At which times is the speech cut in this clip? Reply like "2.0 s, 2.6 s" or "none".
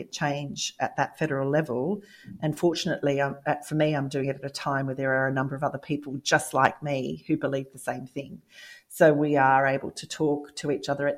none